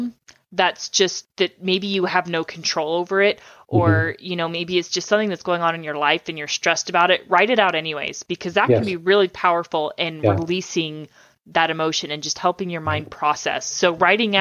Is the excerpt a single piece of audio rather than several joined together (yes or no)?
yes